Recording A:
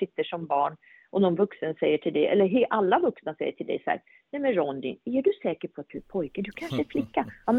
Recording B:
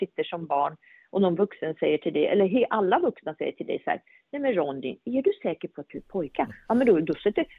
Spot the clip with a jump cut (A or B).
B